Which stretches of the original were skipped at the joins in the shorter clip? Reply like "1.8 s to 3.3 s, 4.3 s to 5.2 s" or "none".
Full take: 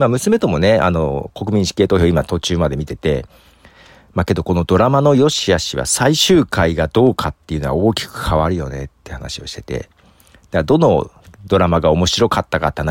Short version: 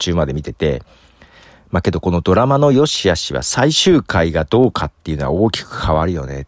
none